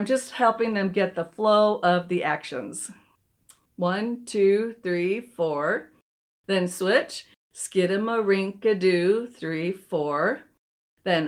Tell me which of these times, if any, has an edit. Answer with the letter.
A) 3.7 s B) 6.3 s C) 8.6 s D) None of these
A